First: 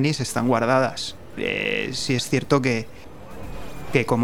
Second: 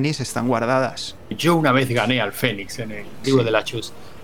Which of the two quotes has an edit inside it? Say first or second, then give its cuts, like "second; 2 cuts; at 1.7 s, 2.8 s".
second; 2 cuts; at 1.3 s, 3.2 s